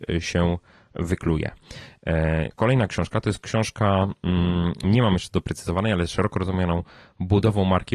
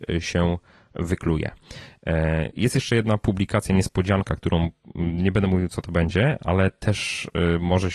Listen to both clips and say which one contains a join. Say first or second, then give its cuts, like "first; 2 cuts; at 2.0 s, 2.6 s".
first; 2 cuts; at 2.5 s, 4.8 s